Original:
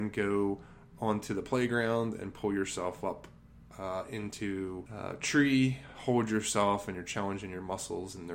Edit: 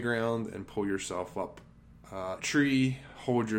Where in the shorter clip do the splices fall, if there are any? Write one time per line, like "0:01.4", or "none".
0:02.4